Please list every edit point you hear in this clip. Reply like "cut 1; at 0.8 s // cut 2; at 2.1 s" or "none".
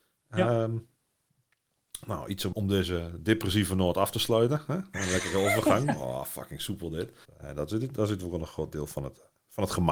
cut 1; at 2.5 s // cut 2; at 7.2 s